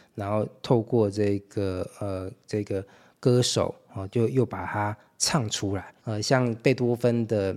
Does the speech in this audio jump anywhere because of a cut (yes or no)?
yes